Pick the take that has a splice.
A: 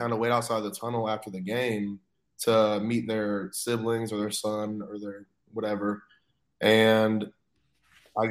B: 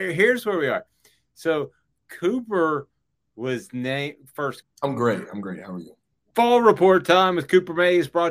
B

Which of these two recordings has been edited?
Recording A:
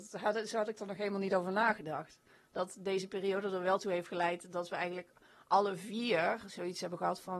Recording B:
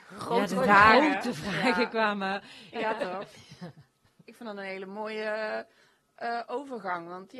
B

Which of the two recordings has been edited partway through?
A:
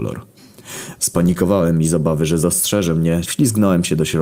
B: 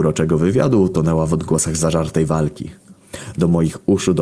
A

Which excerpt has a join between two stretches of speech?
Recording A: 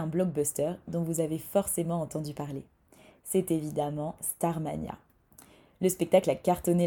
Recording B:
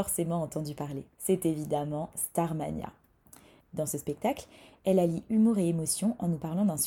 B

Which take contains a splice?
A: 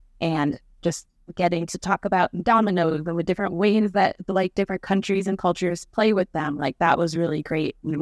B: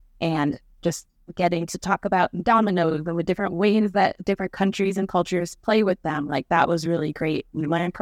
B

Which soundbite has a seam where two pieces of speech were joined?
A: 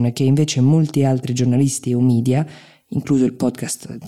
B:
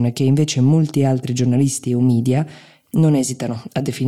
B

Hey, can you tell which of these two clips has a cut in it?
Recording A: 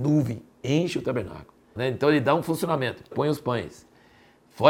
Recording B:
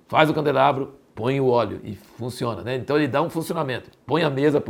A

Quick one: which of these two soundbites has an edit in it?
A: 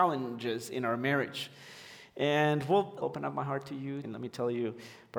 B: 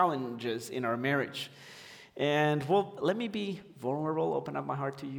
A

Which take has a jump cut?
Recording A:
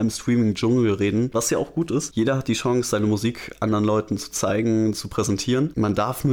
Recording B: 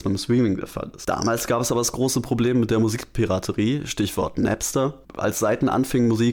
A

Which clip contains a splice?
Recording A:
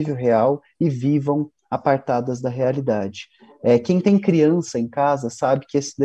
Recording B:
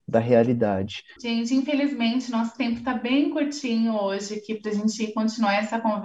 B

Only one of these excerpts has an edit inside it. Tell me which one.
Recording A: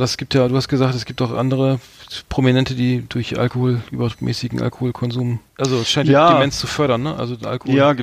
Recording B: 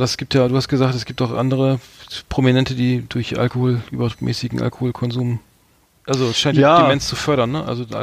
A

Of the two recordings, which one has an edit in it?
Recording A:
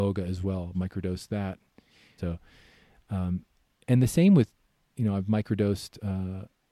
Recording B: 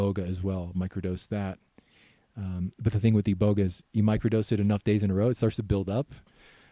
A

